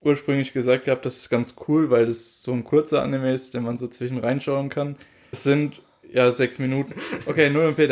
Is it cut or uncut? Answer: cut